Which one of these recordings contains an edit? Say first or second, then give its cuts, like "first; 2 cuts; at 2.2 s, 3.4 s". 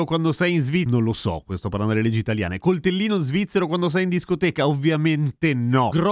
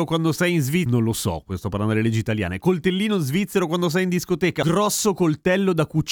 second; 1 cut; at 4.6 s